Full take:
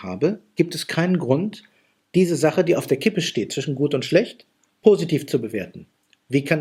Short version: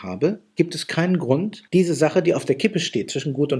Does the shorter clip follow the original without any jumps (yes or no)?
no